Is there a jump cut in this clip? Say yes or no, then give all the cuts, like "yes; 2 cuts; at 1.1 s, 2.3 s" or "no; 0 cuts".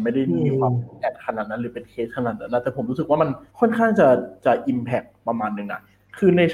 yes; 1 cut; at 3.5 s